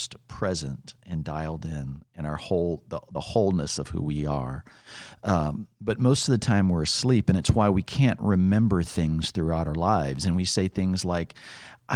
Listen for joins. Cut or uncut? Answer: uncut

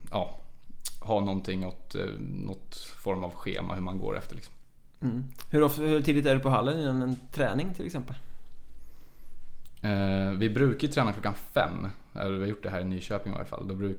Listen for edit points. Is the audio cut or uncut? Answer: uncut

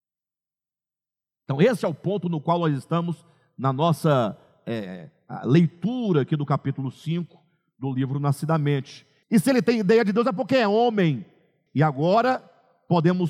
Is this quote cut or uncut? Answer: cut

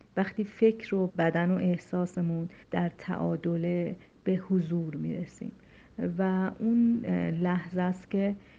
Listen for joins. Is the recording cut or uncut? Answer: cut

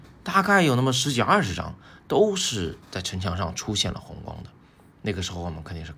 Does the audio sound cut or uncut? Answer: uncut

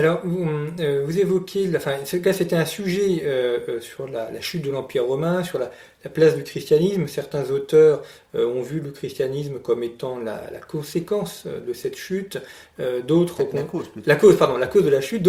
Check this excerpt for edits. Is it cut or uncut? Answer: uncut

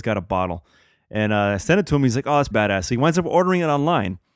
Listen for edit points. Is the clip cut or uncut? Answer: cut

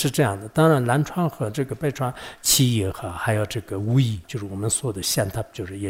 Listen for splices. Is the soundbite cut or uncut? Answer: cut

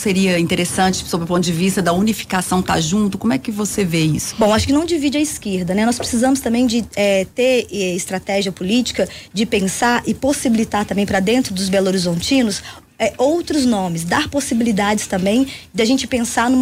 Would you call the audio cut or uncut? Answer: cut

